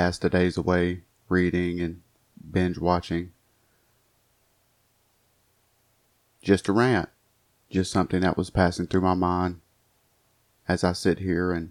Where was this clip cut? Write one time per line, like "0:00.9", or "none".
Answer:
0:07.6